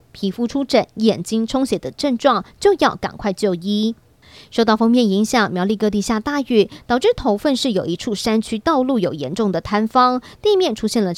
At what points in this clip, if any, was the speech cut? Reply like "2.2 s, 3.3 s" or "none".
none